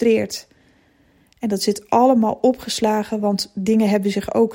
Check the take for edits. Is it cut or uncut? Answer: uncut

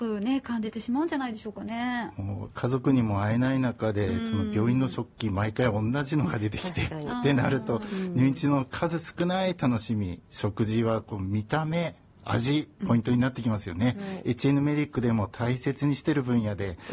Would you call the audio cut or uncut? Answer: uncut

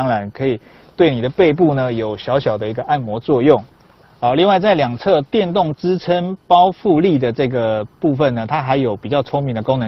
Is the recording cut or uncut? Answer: uncut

